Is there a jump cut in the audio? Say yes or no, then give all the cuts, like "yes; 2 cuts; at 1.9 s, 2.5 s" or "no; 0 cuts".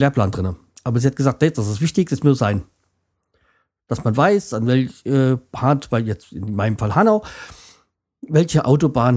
no; 0 cuts